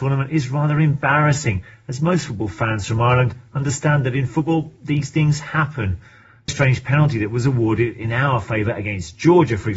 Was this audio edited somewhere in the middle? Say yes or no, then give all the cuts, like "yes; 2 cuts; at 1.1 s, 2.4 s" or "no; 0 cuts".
yes; 1 cut; at 6.5 s